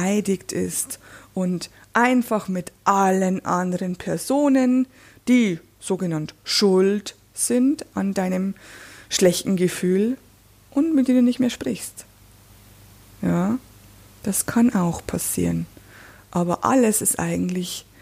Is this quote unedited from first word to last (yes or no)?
yes